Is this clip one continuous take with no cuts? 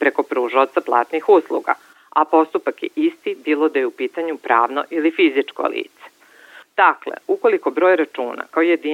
no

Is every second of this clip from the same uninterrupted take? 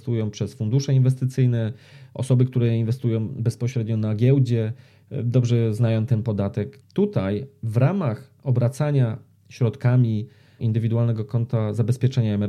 no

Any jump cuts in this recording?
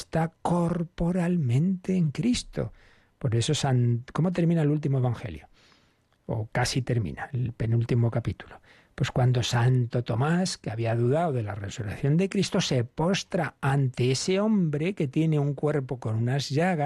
no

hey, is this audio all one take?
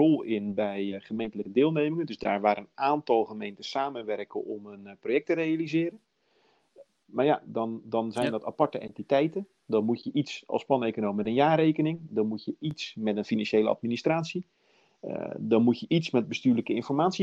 yes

